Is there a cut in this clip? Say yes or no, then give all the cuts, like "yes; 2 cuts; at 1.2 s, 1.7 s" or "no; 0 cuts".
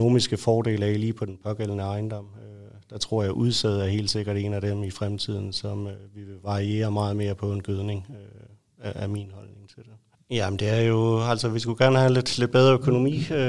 yes; 1 cut; at 10.1 s